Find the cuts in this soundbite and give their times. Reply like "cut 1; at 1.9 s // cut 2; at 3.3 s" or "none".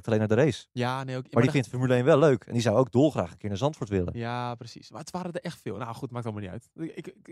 none